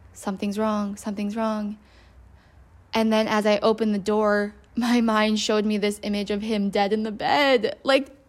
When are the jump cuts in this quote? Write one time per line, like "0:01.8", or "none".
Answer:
none